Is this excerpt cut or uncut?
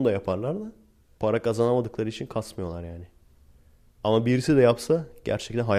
cut